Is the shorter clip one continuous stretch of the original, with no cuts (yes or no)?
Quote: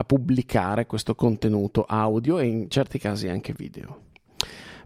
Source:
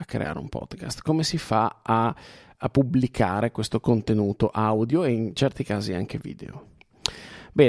yes